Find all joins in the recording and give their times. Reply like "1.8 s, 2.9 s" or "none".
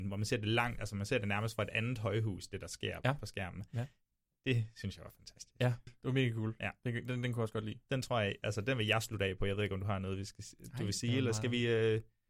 5.9 s